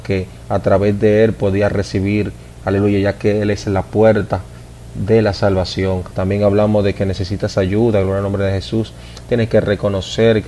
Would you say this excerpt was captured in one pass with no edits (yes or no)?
no